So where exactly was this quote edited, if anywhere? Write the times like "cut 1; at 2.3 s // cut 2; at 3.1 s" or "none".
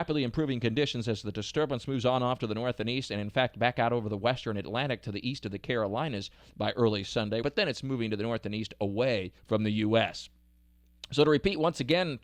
cut 1; at 7.4 s // cut 2; at 9.4 s